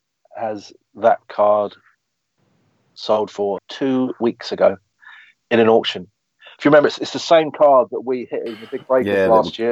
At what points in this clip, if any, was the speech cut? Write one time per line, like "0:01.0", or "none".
0:03.6